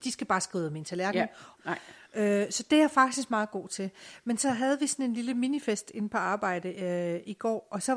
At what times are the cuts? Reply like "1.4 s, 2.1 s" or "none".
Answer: 1.6 s